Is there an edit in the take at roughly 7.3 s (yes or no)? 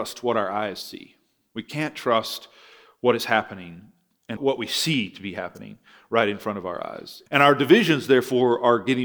yes